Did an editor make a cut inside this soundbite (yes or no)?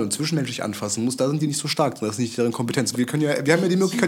yes